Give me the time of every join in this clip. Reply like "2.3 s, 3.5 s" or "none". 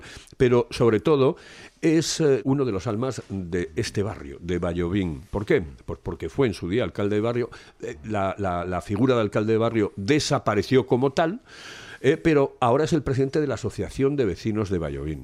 2.4 s